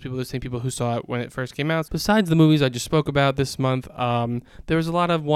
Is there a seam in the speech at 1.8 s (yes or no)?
yes